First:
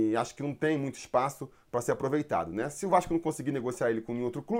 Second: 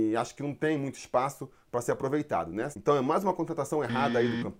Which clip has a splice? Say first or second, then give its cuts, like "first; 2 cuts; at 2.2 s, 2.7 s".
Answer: second; 1 cut; at 2.7 s